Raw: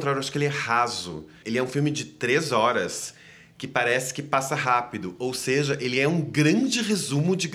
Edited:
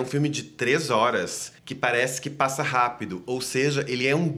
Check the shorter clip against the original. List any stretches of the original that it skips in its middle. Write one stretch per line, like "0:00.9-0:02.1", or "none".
0:03.2-0:03.5